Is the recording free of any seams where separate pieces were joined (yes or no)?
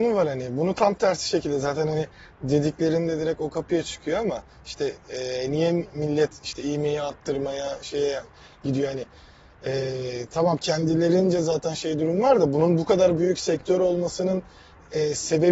yes